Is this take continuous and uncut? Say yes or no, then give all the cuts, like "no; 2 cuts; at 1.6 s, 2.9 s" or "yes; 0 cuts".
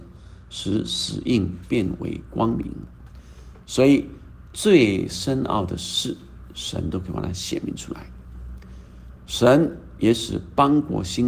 yes; 0 cuts